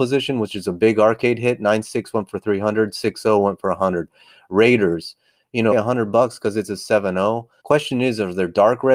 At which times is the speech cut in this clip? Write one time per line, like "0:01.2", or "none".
0:05.7
0:07.6